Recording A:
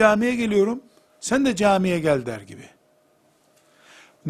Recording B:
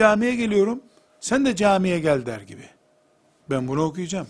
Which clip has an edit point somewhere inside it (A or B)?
B